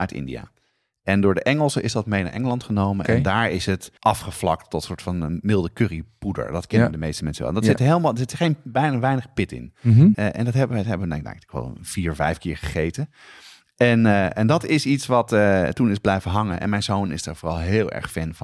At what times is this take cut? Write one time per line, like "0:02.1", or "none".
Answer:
0:04.0
0:10.1